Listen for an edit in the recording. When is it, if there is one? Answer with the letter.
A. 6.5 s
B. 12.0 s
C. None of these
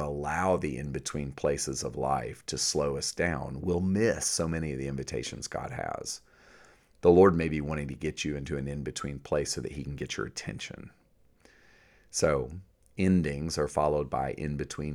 C